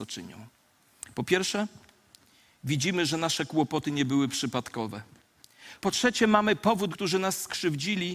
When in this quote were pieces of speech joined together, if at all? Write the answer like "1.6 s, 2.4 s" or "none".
5.8 s, 6.9 s